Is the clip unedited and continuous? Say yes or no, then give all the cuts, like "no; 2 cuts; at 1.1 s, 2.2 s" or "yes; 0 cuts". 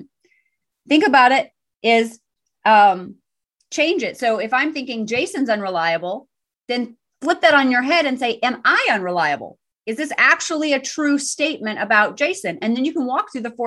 yes; 0 cuts